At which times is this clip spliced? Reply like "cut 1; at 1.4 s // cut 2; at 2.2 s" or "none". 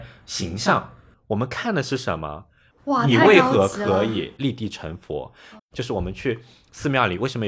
cut 1; at 2.7 s // cut 2; at 5.6 s

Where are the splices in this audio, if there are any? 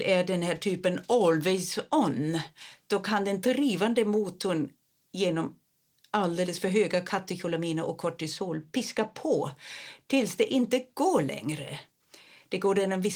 none

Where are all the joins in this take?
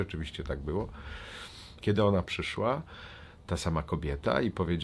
cut 1; at 1.8 s

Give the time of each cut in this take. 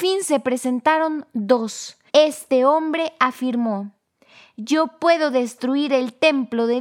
cut 1; at 2.1 s

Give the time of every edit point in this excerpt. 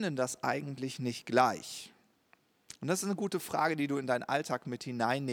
cut 1; at 2.8 s

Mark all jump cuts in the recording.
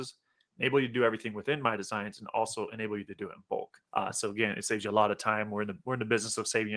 cut 1; at 3.9 s

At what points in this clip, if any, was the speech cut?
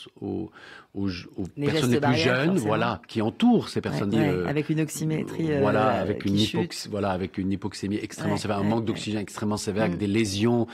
cut 1; at 4.1 s

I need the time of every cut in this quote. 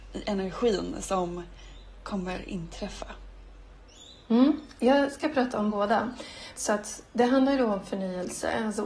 cut 1; at 6.6 s

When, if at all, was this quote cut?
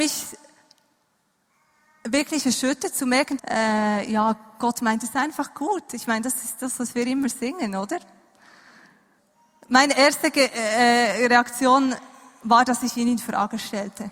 cut 1; at 3.4 s

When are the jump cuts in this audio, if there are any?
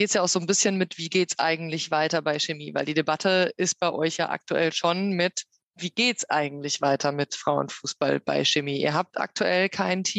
none

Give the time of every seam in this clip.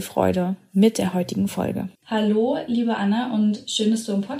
cut 1; at 2.0 s

